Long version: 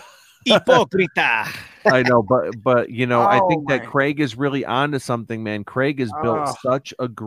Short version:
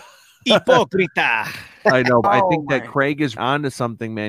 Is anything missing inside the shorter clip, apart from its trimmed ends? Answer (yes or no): yes